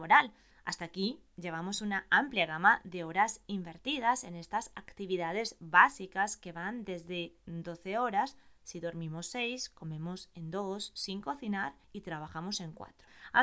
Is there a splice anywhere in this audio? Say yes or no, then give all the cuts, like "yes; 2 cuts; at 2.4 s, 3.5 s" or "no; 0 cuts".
no; 0 cuts